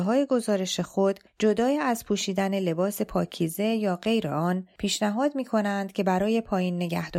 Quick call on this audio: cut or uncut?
uncut